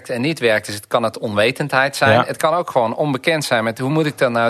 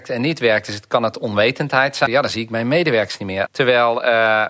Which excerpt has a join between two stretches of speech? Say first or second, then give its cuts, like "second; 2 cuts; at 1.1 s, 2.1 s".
second; 2 cuts; at 2.0 s, 3.4 s